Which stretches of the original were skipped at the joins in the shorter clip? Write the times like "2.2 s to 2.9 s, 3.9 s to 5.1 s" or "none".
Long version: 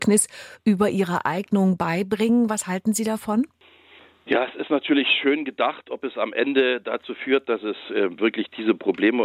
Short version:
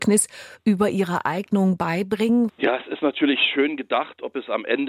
2.5 s to 4.2 s